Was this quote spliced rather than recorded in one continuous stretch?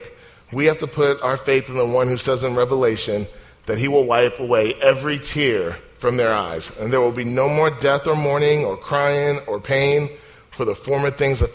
no; 0 cuts

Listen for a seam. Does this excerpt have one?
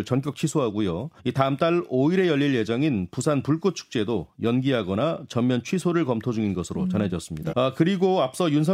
yes; 2 cuts; at 1.2 s, 7.5 s

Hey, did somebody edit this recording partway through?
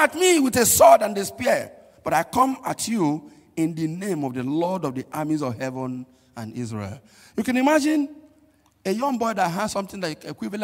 no; 0 cuts

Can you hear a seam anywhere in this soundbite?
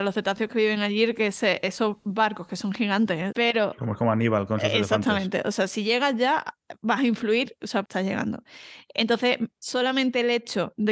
yes; 3 cuts; at 3.3 s, 7.8 s, 9.5 s

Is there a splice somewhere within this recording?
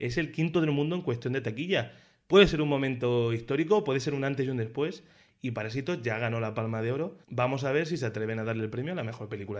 yes; 1 cut; at 7.2 s

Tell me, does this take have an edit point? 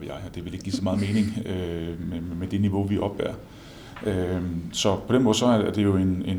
no; 0 cuts

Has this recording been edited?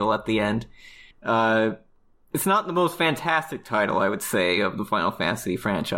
yes; 1 cut; at 1.1 s

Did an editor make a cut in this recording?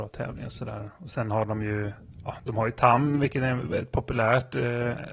no; 0 cuts

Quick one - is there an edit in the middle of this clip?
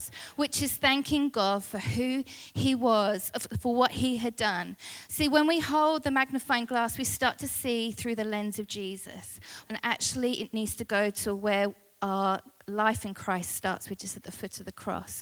yes; 1 cut; at 9.6 s

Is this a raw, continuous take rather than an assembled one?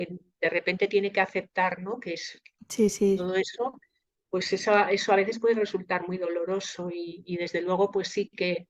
yes; 0 cuts

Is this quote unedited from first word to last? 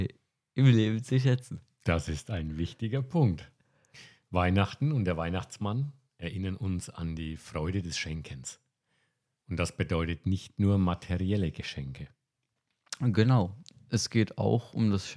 yes; 0 cuts

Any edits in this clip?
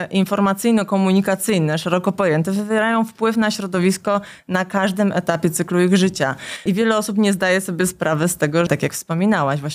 yes; 2 cuts; at 6.7 s, 8.7 s

